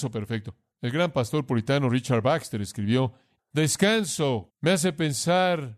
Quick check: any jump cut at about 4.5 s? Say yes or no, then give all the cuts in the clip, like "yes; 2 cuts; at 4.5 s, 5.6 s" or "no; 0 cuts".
yes; 2 cuts; at 3.4 s, 4.5 s